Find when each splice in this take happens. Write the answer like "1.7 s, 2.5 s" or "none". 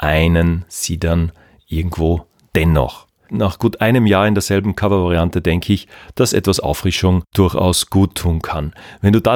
3.3 s